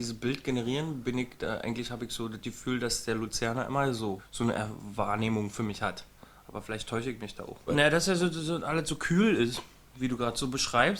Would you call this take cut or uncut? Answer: cut